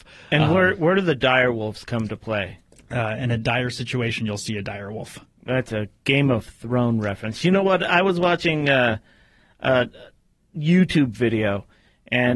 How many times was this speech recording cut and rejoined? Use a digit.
0